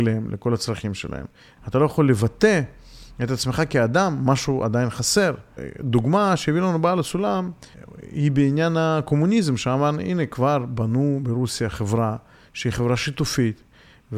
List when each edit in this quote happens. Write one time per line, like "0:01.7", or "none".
0:01.6